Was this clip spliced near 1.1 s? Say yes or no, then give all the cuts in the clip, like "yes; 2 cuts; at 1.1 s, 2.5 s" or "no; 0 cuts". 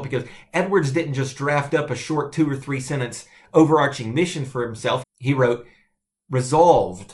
no; 1 cut; at 5.0 s